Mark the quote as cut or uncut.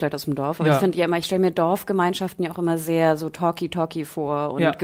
uncut